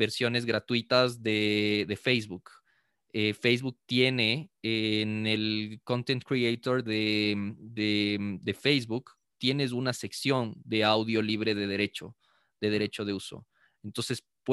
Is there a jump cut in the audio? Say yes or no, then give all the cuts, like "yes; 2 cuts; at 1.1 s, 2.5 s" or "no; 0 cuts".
no; 0 cuts